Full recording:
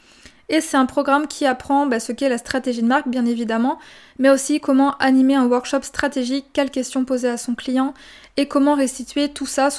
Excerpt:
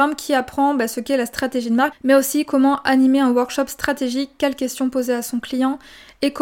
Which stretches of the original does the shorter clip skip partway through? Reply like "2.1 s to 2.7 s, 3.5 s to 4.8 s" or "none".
3.0 s to 4.1 s